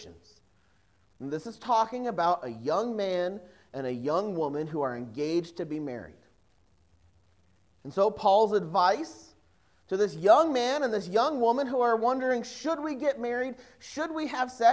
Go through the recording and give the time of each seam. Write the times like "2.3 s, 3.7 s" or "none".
none